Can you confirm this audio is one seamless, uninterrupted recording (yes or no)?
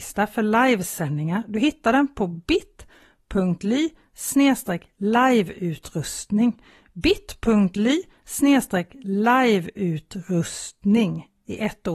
yes